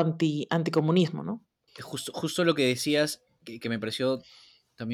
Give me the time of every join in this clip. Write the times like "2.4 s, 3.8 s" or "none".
none